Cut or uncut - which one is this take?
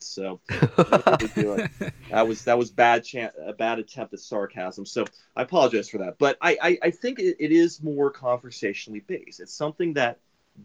uncut